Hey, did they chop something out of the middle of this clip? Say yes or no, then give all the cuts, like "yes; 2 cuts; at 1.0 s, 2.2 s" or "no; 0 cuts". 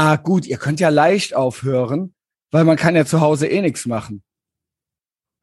no; 0 cuts